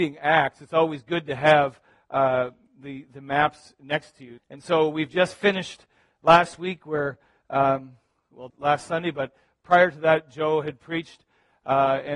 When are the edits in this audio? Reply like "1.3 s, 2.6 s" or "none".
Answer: 4.4 s, 8.5 s

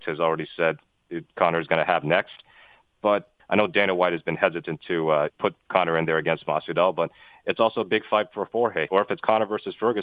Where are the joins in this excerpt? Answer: 3.4 s, 5.3 s, 8.9 s

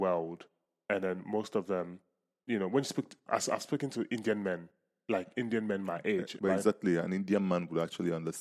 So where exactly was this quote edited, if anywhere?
6.4 s

